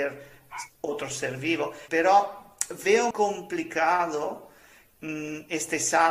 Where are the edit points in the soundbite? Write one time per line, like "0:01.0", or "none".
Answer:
0:01.9
0:03.1